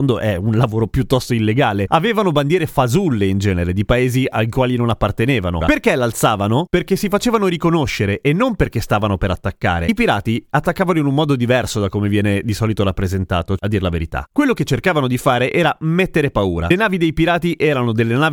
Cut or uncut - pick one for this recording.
cut